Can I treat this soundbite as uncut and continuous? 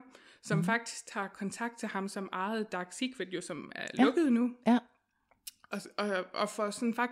yes; 0 cuts

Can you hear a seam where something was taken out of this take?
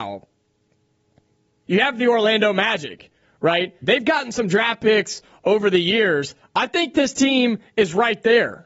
yes; 2 cuts; at 1.6 s, 3.8 s

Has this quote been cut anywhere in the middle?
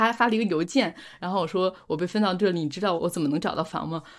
yes; 1 cut; at 3.0 s

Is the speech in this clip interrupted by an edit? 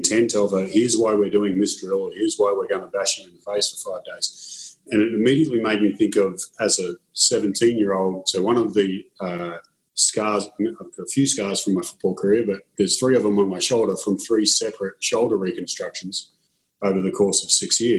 no; 0 cuts

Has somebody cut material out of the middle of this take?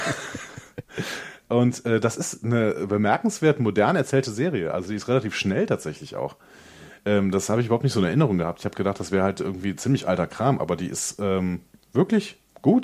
no; 0 cuts

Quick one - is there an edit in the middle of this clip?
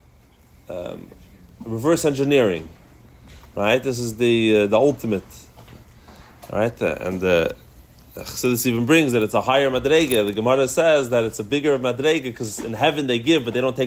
no; 0 cuts

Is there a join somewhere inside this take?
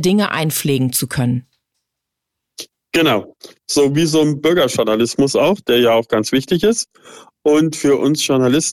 no; 0 cuts

